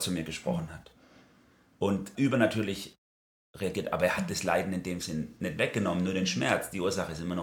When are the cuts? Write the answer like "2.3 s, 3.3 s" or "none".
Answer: 2.1 s

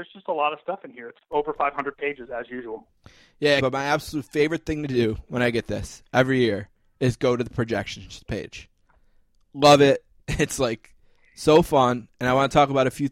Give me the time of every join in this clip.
3.6 s

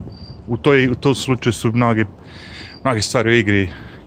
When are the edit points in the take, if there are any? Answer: none

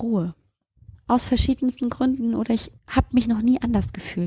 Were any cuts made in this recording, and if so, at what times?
0.9 s

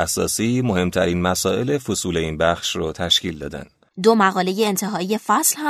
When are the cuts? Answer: 3.9 s

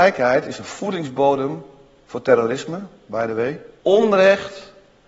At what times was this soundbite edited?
3.8 s

